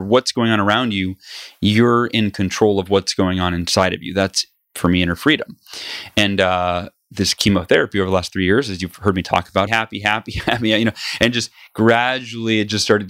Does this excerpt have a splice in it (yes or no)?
yes